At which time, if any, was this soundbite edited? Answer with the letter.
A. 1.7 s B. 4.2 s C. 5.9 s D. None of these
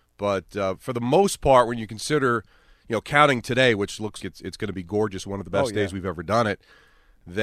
B